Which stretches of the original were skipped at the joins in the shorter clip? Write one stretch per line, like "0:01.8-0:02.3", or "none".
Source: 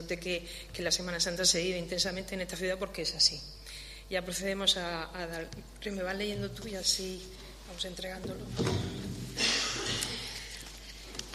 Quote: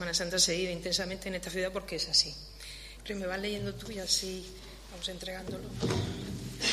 0:04.0-0:05.7